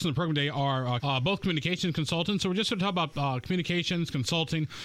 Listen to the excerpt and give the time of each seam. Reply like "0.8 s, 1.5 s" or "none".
1.0 s